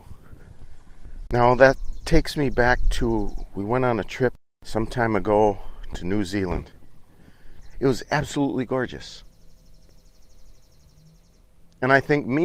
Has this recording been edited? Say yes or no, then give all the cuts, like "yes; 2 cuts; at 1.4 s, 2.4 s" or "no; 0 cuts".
yes; 1 cut; at 7.7 s